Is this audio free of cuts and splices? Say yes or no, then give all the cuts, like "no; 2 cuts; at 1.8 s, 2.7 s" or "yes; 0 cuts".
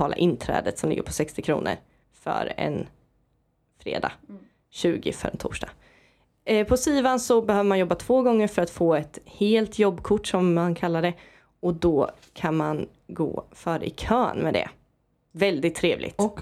yes; 0 cuts